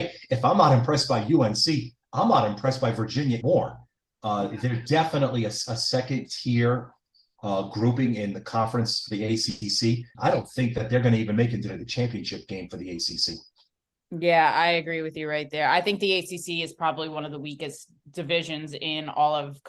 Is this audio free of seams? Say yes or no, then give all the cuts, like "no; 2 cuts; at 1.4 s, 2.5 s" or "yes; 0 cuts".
no; 2 cuts; at 3.4 s, 10.1 s